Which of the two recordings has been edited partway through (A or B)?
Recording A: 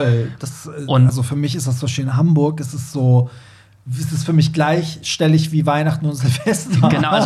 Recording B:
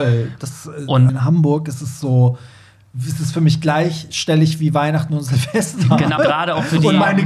B